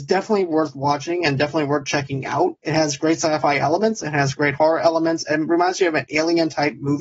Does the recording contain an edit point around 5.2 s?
no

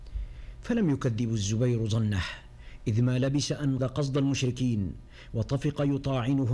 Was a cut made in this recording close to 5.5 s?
no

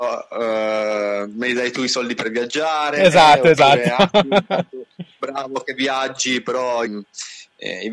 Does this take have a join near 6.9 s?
yes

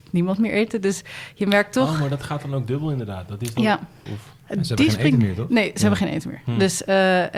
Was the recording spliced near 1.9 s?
no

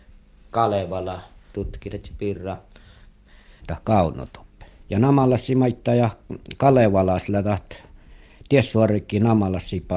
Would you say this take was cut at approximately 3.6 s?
yes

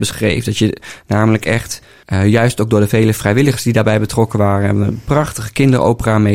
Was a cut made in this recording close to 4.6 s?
no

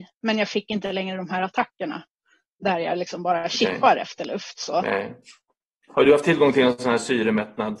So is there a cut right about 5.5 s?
no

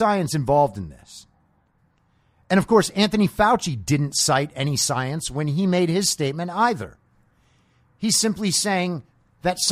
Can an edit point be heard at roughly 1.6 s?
no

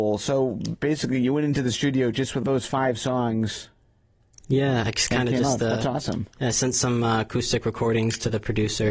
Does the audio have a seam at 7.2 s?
no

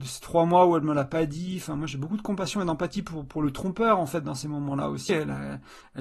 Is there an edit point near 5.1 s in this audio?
yes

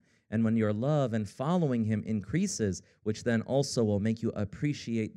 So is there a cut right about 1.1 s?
no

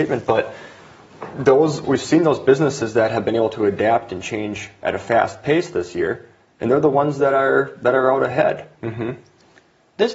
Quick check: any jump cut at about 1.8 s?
yes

